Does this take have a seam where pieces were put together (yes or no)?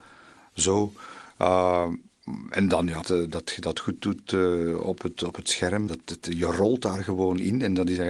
yes